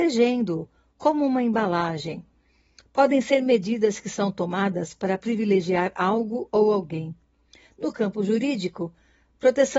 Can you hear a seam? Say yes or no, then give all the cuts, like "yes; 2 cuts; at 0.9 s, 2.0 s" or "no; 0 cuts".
no; 0 cuts